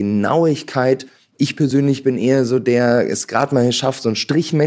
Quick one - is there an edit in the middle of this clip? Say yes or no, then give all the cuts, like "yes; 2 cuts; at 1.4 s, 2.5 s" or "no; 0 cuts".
no; 0 cuts